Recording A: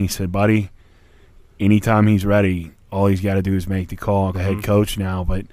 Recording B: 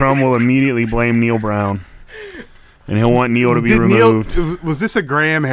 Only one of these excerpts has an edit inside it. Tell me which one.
A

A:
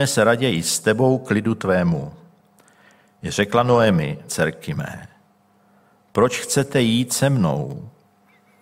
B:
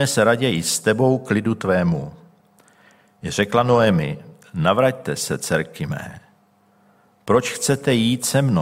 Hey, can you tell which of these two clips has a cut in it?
A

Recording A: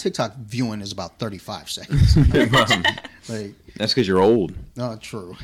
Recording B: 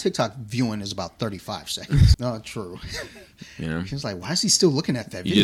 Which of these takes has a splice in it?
B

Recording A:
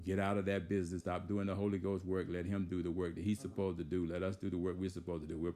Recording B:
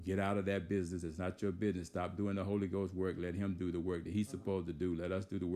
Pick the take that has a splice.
A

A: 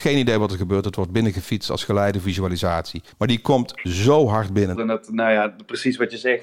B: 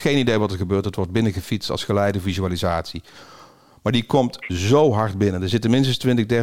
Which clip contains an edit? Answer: A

